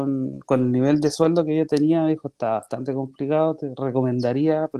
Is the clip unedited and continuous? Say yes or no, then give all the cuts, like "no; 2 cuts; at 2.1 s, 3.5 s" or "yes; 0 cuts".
yes; 0 cuts